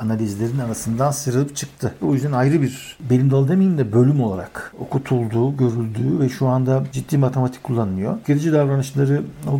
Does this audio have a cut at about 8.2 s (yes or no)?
no